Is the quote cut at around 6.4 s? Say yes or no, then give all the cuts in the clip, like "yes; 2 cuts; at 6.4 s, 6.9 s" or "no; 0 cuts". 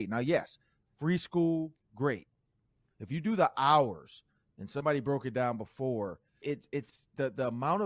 yes; 2 cuts; at 2.9 s, 6.4 s